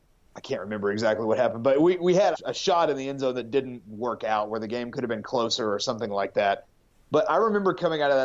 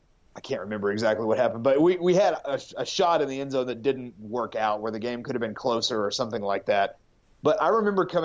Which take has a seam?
first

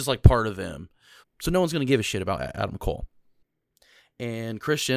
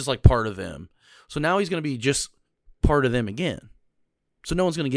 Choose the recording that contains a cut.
first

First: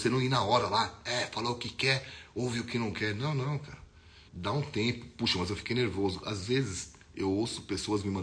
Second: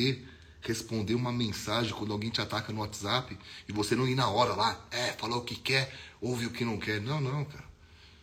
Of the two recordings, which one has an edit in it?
first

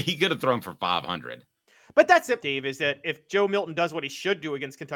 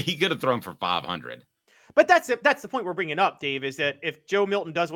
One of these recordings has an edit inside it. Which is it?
first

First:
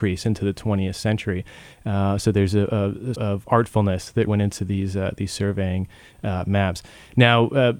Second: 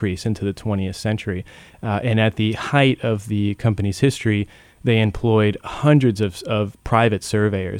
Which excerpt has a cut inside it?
first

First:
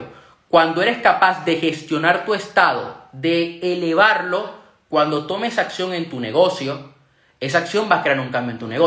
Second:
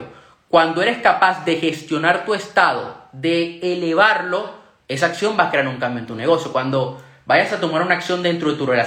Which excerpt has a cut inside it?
second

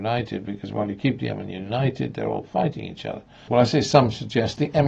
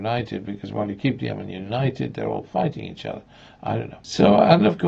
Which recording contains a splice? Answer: first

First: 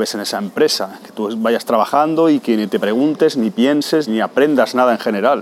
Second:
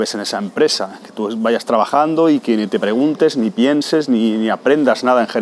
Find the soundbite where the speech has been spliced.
first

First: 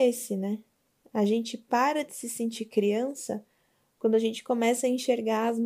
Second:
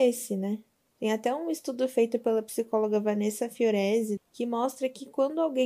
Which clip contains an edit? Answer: second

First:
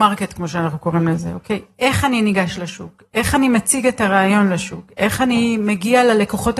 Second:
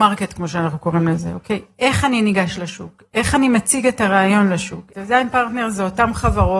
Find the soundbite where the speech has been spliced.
second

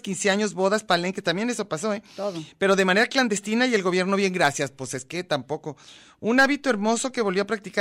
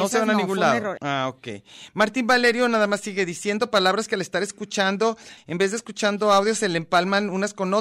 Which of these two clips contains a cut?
second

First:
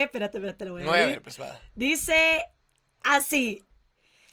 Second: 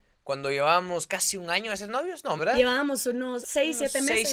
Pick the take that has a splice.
second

